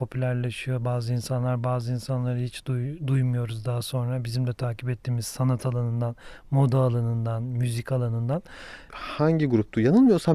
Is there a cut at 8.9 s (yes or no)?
yes